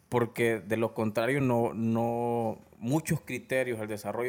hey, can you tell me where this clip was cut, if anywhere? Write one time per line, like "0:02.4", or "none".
none